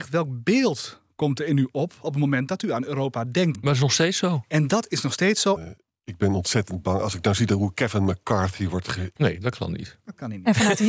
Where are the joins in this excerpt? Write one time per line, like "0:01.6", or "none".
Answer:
0:03.5
0:05.6
0:09.2